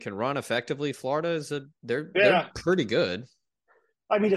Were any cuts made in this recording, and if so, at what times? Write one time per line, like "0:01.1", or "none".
0:01.8